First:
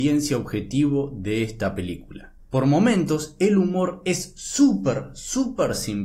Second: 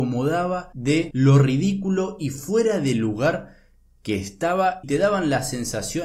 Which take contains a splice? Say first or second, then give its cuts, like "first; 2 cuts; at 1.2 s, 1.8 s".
first; 1 cut; at 2.4 s